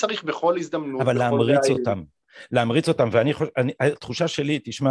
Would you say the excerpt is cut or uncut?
uncut